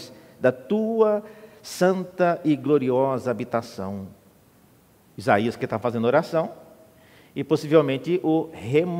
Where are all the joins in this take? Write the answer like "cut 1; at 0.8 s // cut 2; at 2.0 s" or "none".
cut 1; at 5.0 s